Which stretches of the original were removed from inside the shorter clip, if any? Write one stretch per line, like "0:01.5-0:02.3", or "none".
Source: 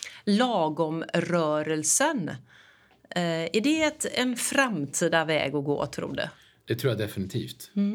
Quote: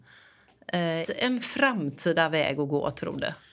0:03.4-0:04.0